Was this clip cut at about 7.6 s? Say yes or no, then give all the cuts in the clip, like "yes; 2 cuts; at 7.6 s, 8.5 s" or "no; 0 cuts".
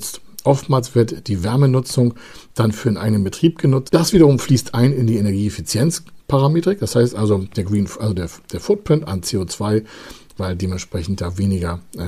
no; 1 cut; at 3.9 s